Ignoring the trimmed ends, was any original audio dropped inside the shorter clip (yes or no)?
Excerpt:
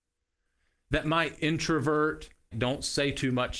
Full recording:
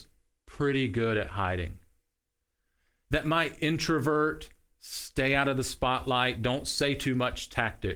yes